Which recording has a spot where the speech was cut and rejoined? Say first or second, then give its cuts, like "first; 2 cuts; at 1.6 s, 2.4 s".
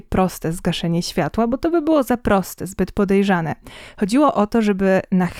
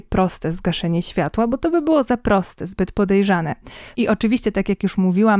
second; 1 cut; at 3.9 s